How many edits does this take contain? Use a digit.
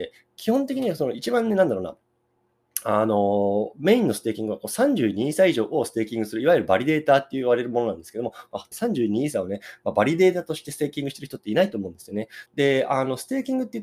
2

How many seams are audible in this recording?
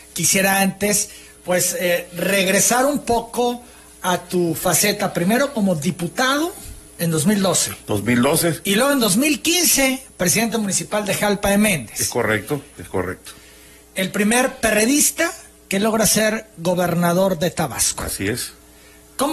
1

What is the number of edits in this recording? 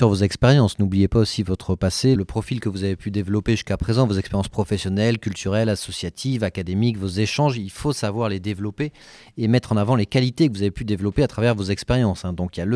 1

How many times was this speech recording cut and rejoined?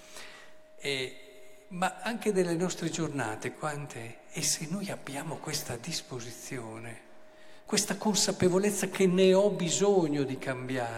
2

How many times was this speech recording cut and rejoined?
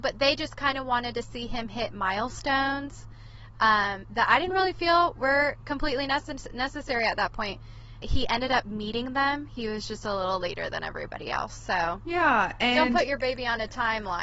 1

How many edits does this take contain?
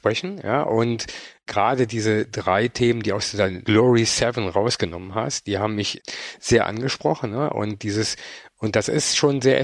0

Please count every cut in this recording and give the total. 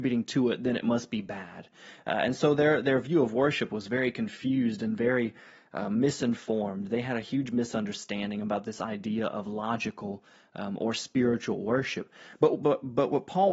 0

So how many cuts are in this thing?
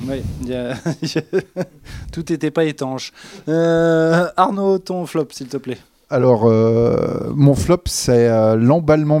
0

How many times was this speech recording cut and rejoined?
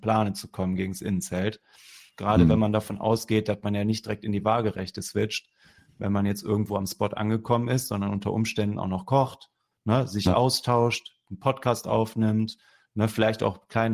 1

